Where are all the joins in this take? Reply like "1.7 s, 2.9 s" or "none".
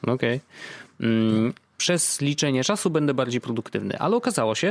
1.7 s